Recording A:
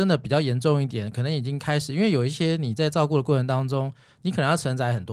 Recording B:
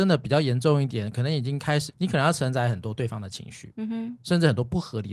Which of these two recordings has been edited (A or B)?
B